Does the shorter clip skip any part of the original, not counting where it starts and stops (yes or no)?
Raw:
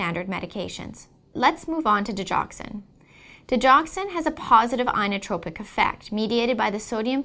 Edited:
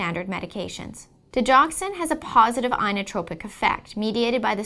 yes